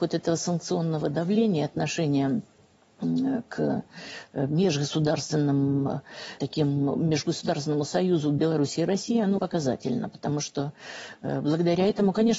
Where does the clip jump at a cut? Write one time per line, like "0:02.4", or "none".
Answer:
0:06.4
0:09.4